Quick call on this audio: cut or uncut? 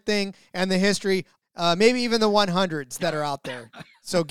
cut